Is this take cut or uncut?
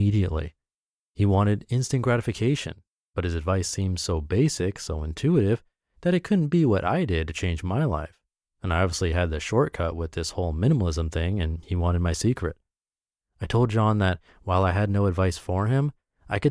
uncut